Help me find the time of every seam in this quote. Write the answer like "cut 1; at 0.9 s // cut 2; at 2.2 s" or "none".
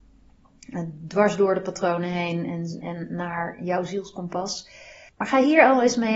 cut 1; at 2.8 s